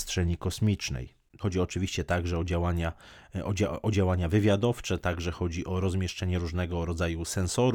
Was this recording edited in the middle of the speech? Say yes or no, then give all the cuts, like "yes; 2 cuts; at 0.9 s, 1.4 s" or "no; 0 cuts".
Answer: yes; 1 cut; at 1.4 s